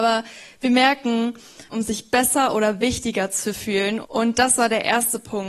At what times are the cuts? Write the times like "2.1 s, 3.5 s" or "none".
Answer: 1.7 s, 4.0 s